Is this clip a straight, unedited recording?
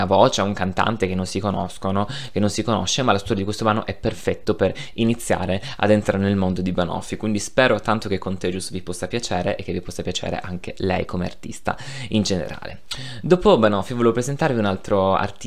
yes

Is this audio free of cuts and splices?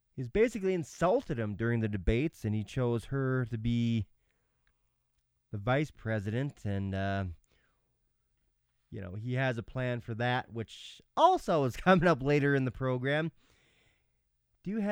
yes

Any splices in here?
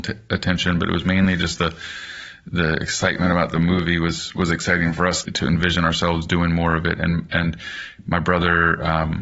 yes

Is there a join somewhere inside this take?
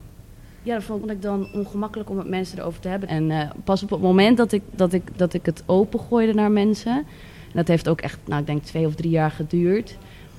yes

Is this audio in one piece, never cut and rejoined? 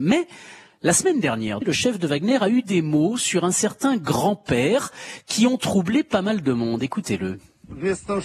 no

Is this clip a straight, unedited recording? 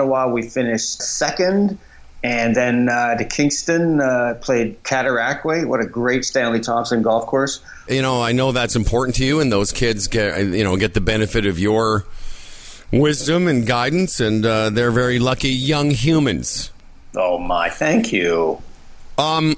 no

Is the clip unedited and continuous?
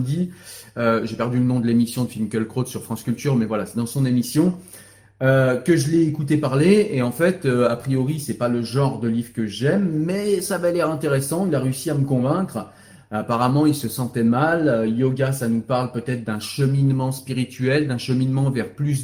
yes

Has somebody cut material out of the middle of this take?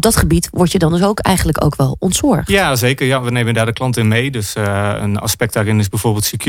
no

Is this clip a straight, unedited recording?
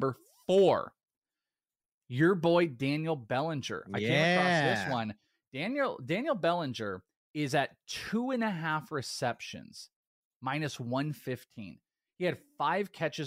yes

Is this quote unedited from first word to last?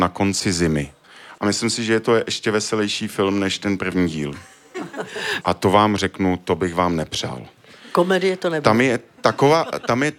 no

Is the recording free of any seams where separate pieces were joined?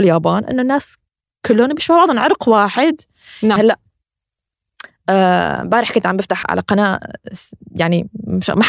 no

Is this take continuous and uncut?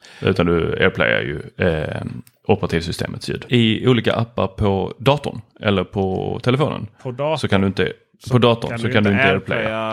no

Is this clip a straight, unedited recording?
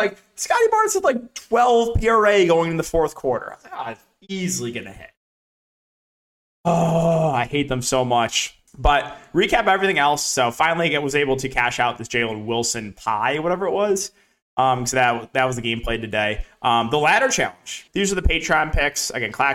no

